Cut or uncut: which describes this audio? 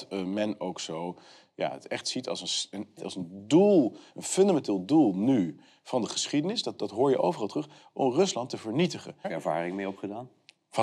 cut